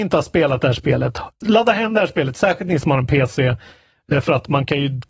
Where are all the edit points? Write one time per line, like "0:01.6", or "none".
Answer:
0:01.4